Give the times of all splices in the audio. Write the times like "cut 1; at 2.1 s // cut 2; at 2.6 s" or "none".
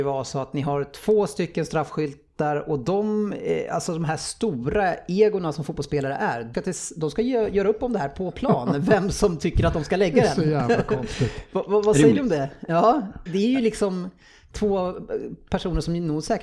cut 1; at 6.5 s // cut 2; at 13.3 s